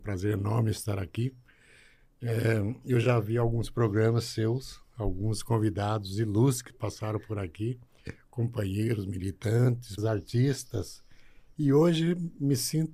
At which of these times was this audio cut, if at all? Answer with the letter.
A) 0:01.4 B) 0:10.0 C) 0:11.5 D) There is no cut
B